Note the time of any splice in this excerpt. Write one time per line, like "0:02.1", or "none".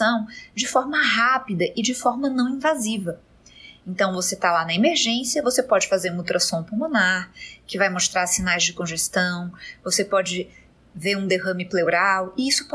none